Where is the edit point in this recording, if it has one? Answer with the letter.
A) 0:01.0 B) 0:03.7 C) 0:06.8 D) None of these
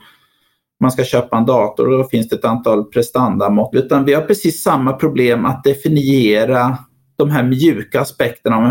B